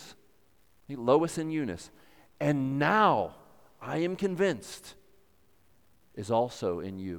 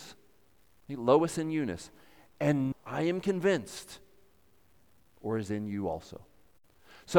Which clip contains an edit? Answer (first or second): second